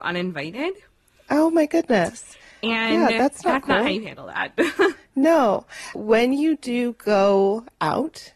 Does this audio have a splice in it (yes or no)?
yes